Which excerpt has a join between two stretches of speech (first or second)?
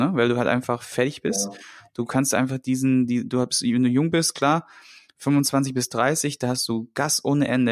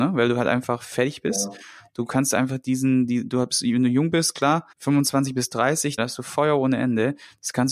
second